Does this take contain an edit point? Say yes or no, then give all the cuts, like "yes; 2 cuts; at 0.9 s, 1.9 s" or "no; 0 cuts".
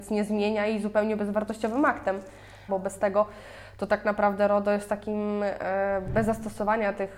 yes; 1 cut; at 2.7 s